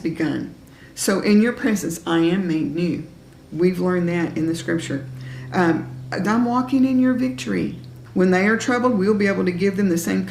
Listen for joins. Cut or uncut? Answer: cut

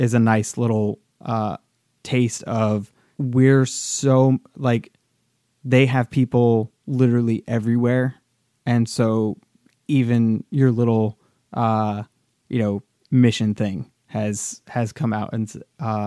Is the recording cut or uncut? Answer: uncut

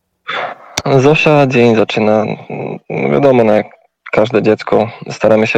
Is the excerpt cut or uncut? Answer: uncut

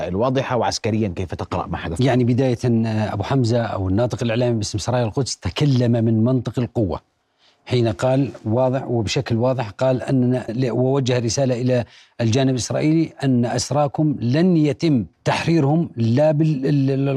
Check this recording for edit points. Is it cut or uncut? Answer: cut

